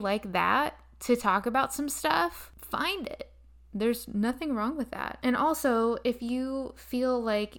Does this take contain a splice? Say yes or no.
no